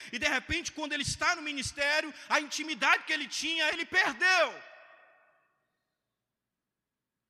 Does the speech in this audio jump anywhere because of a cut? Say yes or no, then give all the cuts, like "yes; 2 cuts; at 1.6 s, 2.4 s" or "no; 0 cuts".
no; 0 cuts